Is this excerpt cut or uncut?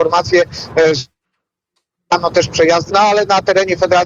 cut